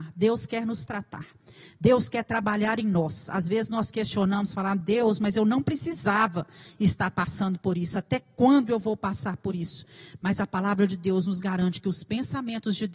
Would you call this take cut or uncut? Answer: uncut